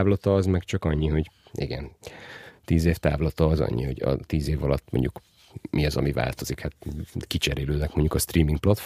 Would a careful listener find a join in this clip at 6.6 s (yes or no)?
no